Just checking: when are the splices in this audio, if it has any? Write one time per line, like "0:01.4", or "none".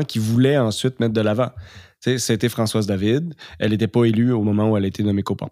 none